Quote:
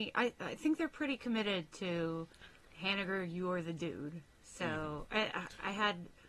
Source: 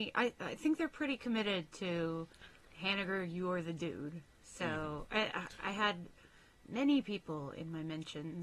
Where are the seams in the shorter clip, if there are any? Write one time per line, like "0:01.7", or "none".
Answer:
none